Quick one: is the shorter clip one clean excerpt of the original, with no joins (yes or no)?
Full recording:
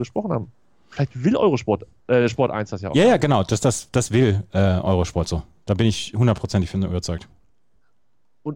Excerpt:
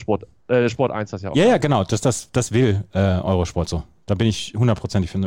yes